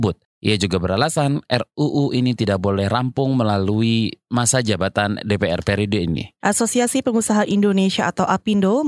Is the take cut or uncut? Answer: uncut